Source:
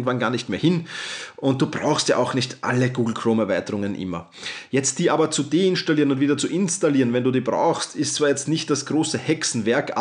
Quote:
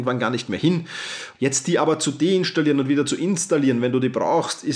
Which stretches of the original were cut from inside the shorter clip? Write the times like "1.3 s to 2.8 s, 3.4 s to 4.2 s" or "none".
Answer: 1.4 s to 4.7 s